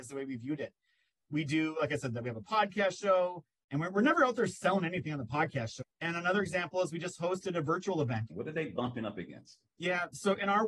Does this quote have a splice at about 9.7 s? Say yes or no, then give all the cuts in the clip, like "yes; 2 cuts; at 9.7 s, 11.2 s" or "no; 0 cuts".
no; 2 cuts; at 5.8 s, 8.3 s